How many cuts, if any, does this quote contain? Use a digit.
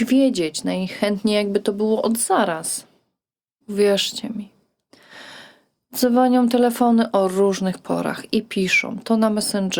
1